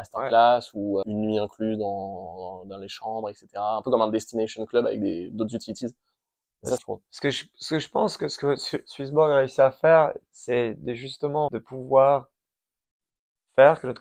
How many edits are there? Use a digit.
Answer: 3